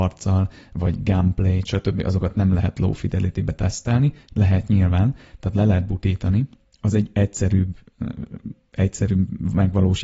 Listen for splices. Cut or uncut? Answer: uncut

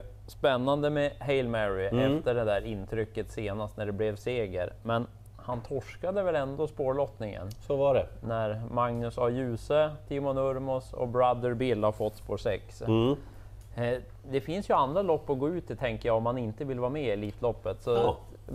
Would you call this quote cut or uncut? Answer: uncut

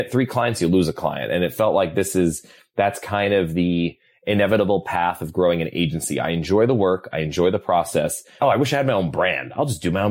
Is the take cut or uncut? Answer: cut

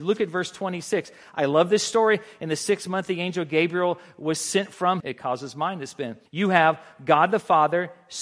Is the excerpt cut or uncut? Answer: cut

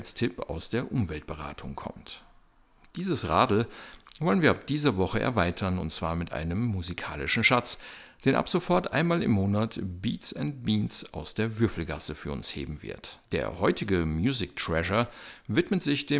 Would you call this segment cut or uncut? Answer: cut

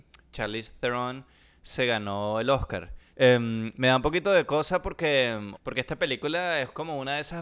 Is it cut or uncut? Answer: cut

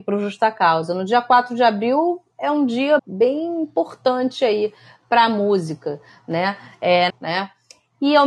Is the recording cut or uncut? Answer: cut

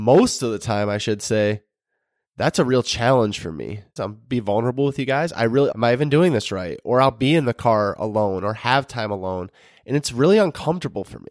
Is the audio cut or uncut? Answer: cut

